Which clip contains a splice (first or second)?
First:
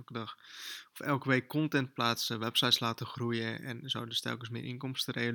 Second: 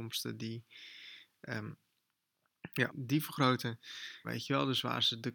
second